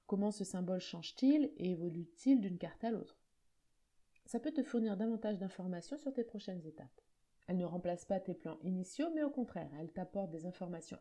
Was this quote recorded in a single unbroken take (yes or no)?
no